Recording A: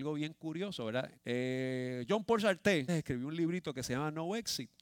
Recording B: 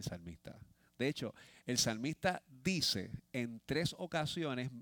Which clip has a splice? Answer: A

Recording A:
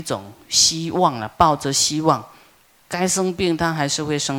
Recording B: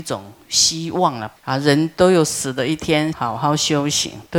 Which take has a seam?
B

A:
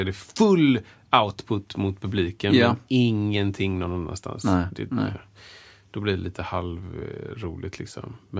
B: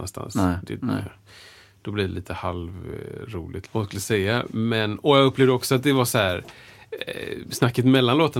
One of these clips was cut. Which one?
B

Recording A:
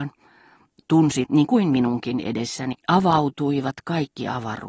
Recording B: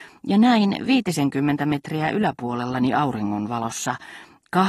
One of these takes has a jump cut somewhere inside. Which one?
A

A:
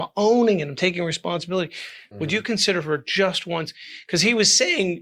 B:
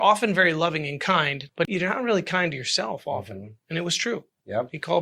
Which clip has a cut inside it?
A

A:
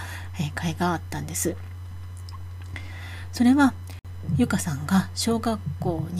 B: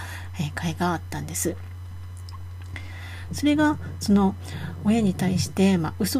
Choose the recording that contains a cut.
B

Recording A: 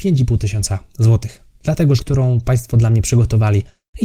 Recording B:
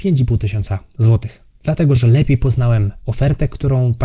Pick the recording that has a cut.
A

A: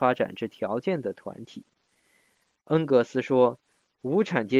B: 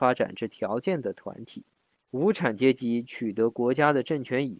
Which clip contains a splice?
B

